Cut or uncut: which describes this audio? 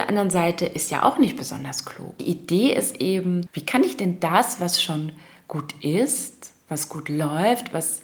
cut